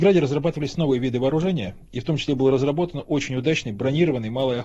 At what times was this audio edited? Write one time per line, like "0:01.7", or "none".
none